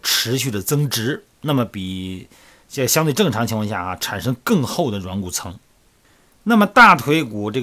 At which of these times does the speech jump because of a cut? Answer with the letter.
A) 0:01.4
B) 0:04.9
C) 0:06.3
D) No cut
C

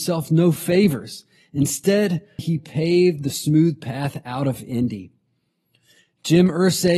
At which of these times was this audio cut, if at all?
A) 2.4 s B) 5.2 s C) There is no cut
A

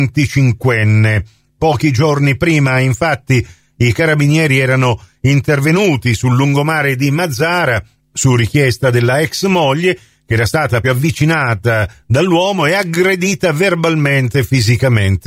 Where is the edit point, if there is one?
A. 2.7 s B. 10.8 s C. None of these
B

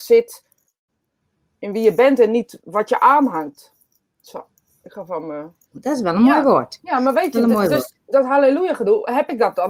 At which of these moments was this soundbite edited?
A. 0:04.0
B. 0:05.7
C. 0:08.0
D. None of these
B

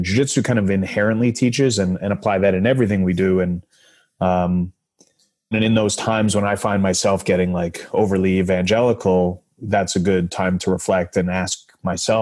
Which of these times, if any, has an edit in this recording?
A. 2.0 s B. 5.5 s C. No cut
B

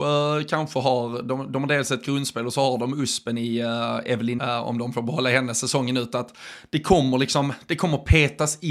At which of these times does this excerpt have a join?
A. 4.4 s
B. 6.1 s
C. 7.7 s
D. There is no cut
A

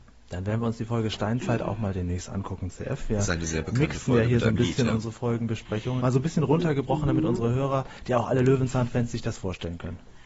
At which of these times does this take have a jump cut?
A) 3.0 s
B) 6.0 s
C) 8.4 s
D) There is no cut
B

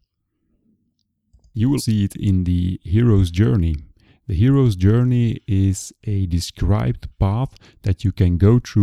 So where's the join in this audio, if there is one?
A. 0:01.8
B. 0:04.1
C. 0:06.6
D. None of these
A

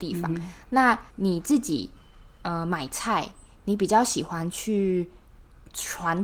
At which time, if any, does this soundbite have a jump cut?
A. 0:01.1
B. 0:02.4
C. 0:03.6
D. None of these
A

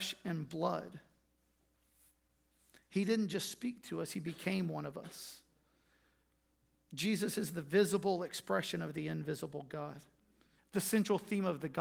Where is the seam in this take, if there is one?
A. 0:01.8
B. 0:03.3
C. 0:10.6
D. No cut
C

